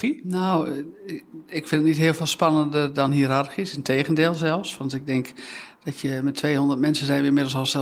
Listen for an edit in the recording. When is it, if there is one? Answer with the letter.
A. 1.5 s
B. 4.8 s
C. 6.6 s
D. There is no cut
D